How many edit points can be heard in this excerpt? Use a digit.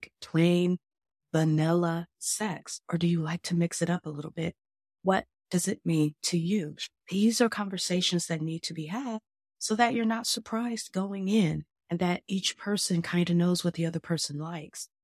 1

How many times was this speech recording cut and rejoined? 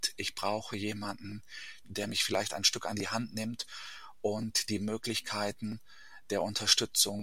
1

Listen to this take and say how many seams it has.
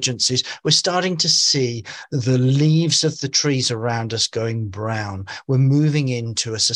0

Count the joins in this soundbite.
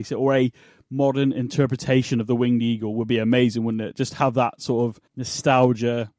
1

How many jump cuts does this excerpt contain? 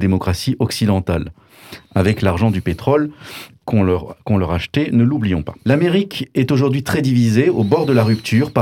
1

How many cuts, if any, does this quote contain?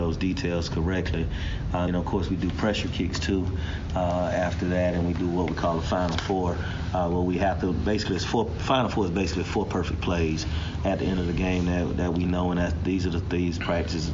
1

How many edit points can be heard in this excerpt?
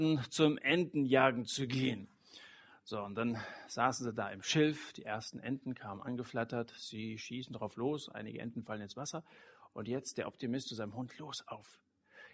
0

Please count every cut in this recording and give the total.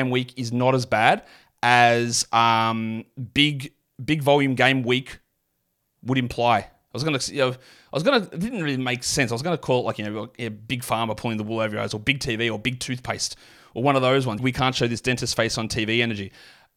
1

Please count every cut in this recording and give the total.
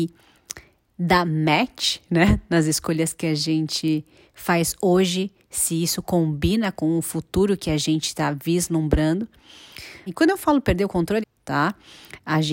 2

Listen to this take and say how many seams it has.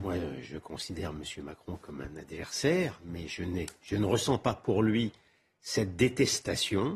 0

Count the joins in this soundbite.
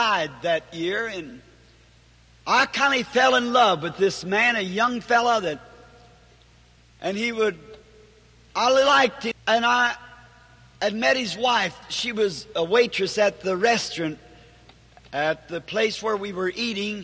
1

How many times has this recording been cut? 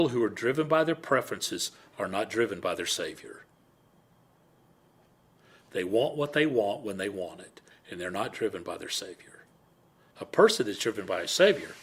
1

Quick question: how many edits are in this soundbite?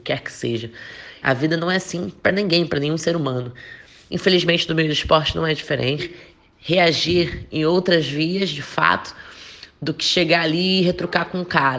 3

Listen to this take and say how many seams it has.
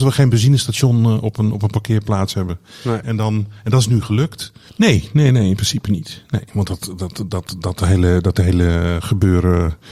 2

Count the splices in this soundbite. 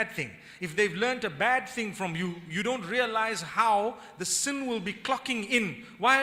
0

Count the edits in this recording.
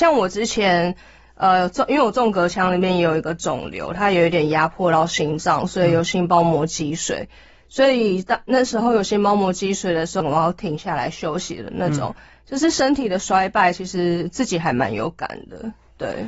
1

